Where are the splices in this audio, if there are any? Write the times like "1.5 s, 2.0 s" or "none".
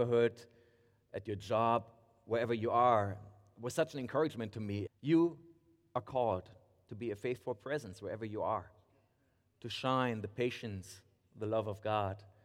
4.9 s